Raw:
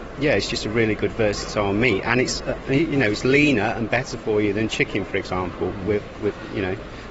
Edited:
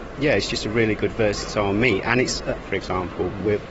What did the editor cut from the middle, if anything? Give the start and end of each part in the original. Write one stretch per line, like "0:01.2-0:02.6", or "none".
0:02.6-0:05.1

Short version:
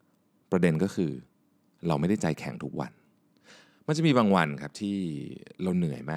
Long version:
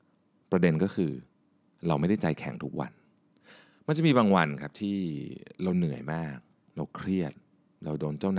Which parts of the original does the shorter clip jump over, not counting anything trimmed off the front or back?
none

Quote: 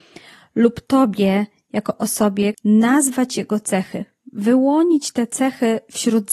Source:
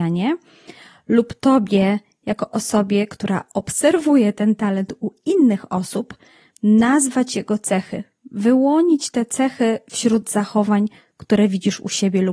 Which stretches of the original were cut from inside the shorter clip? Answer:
0:03.1-0:06.5

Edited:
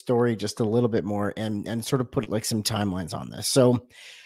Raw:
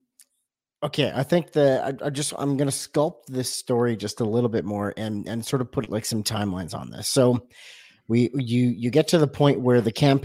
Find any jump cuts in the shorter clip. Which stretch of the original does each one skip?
none

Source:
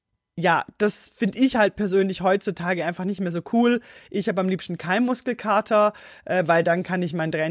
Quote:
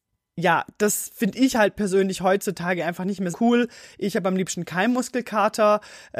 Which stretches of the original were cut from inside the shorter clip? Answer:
0:03.3-0:03.4

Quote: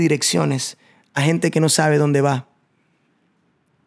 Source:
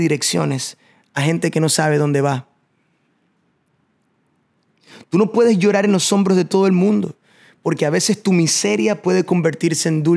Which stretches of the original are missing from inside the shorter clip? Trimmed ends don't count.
none

